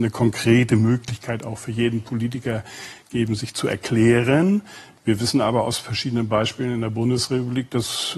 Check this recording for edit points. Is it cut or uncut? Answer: uncut